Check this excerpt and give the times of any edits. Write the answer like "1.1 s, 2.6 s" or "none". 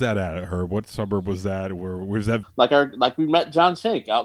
2.4 s